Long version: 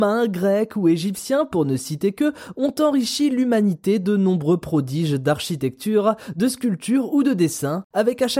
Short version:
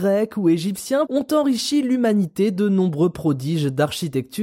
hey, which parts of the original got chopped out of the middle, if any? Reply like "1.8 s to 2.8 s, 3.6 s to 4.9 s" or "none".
1.5 s to 2.5 s